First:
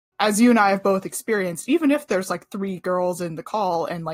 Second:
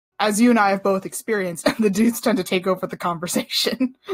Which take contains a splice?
second; 1 cut; at 1.6 s

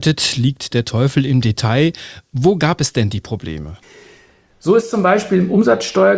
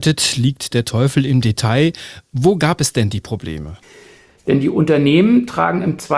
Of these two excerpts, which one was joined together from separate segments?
second; 1 cut; at 4.3 s

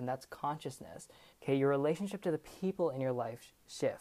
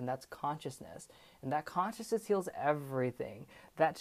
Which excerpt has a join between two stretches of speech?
first; 1 cut; at 1.3 s

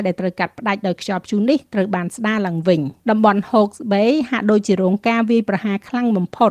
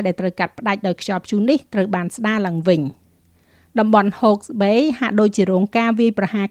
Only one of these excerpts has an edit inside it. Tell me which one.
first; 1 cut; at 3.0 s

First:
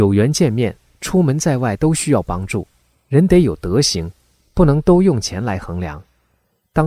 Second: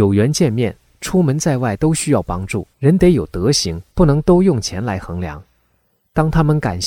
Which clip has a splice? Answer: second; 2 cuts; at 2.7 s, 3.9 s

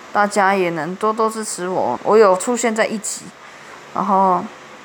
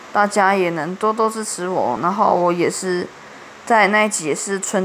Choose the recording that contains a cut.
first; 1 cut; at 2.0 s

